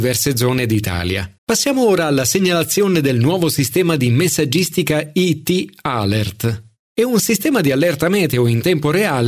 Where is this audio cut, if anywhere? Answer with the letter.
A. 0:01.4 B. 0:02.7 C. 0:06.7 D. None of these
A